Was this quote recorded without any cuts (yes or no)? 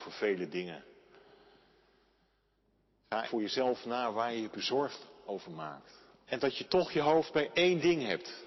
no